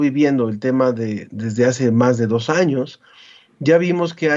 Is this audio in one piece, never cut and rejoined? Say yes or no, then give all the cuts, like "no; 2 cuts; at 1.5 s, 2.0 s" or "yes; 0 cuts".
no; 1 cut; at 1.3 s